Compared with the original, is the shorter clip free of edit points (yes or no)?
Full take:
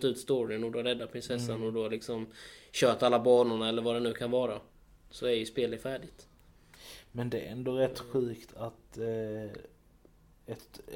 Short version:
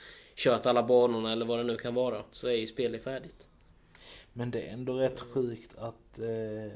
no